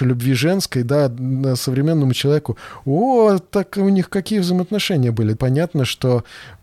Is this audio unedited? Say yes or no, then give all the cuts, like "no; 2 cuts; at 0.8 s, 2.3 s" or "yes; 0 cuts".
no; 1 cut; at 5.3 s